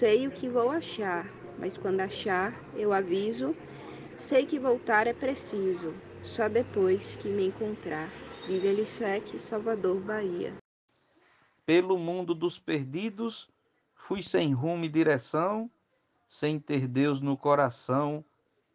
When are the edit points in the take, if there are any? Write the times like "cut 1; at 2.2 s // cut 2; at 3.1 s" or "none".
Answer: none